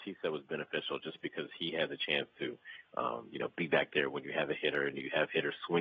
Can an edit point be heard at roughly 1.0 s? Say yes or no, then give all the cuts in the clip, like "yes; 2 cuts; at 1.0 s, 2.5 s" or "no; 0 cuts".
no; 0 cuts